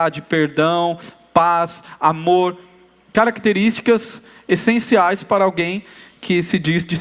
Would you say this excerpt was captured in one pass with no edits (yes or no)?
yes